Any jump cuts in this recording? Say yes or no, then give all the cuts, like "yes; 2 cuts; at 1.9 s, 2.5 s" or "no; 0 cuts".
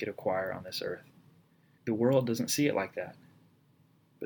yes; 1 cut; at 1.8 s